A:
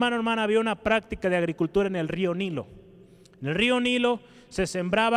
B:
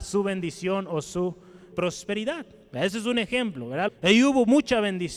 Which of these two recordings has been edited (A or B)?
B